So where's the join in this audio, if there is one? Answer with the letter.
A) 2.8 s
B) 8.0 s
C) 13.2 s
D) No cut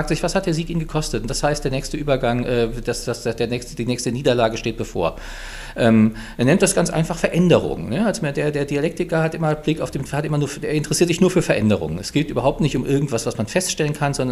D